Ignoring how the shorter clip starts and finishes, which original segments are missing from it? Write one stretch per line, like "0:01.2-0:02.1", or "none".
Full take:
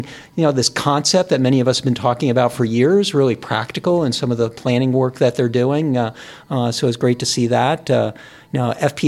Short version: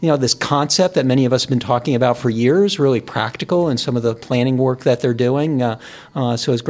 none